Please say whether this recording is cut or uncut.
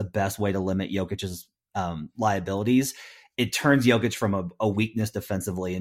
uncut